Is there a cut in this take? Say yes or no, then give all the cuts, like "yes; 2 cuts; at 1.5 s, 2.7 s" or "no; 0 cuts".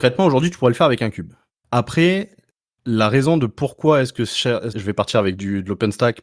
yes; 1 cut; at 4.7 s